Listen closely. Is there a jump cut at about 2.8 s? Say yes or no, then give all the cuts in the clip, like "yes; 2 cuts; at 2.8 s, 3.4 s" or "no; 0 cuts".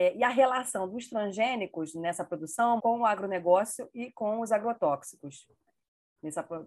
yes; 1 cut; at 2.8 s